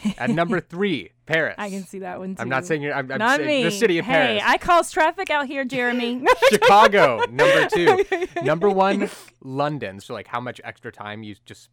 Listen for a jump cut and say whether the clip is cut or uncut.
cut